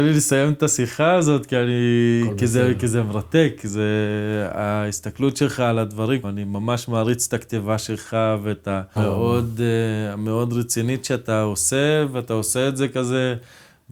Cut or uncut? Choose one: cut